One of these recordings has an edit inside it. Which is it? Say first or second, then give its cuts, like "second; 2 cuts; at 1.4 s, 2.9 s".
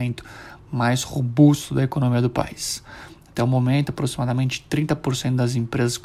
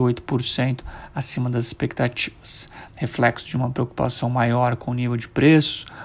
second; 1 cut; at 2.9 s